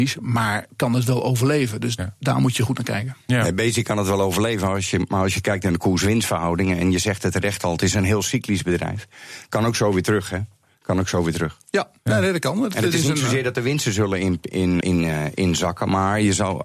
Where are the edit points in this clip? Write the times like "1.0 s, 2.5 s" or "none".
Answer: 12.0 s, 14.8 s